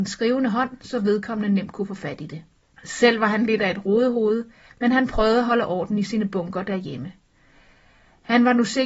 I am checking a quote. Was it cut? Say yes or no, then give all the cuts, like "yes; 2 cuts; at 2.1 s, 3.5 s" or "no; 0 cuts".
yes; 1 cut; at 2.6 s